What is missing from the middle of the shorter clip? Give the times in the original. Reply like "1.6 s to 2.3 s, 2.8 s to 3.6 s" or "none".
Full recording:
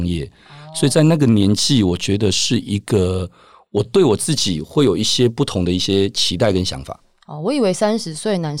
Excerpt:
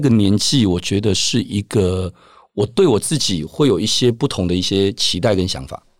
none